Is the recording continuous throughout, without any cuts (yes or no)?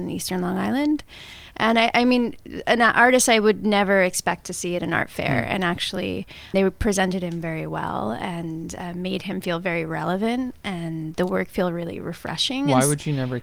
yes